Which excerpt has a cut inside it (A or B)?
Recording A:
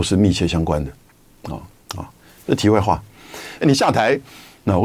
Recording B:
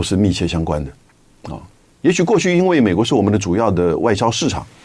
A